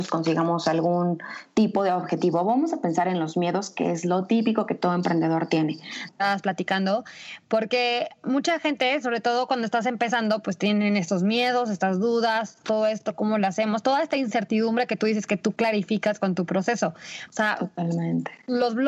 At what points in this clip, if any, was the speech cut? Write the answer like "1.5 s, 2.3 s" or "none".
6.1 s, 17.3 s